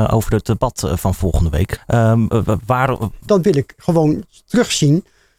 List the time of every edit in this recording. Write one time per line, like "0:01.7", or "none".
0:01.8
0:03.3